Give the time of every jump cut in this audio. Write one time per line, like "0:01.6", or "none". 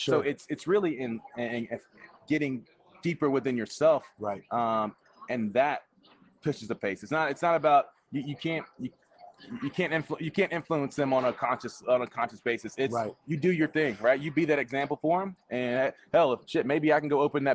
0:16.4